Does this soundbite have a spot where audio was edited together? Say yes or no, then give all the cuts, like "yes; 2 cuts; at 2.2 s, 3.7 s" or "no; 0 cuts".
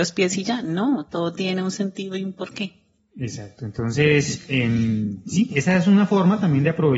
no; 0 cuts